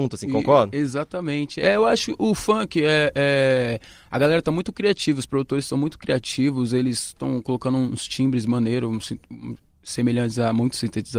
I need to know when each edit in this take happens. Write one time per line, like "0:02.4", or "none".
none